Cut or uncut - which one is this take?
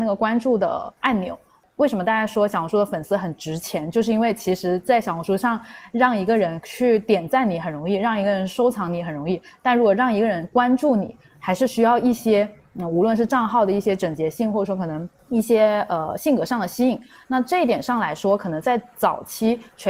uncut